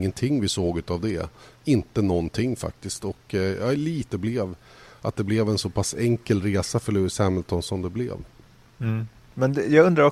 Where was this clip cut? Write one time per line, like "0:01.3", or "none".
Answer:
0:04.1